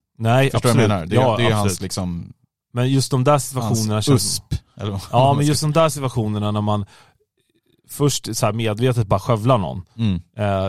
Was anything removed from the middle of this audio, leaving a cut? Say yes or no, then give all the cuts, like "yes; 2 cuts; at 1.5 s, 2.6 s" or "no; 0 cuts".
no; 0 cuts